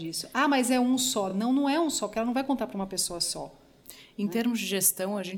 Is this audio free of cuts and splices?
yes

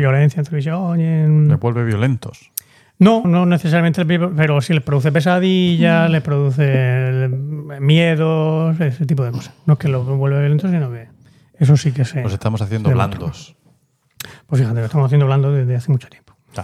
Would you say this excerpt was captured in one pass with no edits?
no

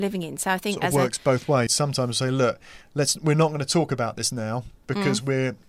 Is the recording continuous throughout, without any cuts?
no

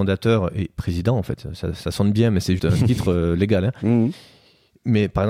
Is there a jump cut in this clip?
yes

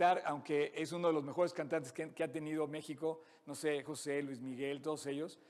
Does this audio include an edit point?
yes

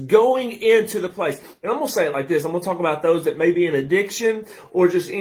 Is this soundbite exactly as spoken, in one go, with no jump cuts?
yes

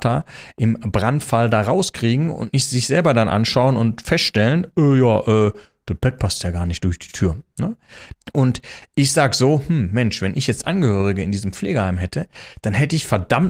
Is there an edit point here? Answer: yes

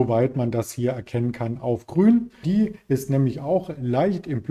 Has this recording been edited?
yes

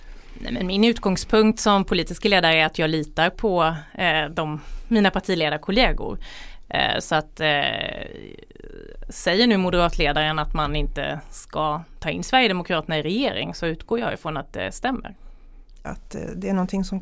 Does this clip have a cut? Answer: yes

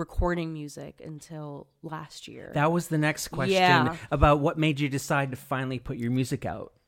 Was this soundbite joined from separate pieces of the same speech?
no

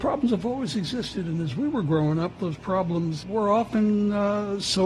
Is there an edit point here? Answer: yes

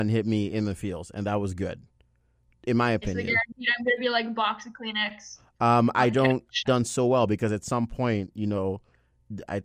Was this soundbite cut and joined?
yes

